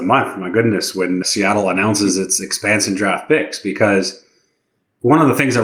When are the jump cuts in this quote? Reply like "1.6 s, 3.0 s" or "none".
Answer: 1.2 s